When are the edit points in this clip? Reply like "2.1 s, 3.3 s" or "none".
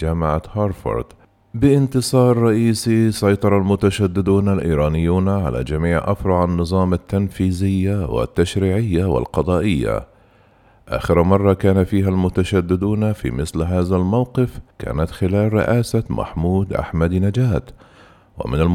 14.7 s

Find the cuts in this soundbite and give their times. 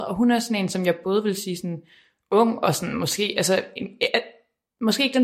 none

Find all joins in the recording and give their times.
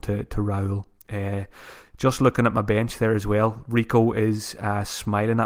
none

